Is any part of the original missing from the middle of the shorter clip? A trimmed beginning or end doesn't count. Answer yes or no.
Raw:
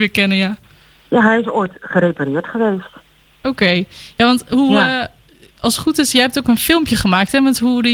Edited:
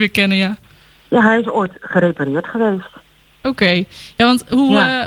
no